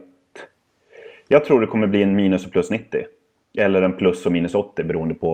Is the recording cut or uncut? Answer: uncut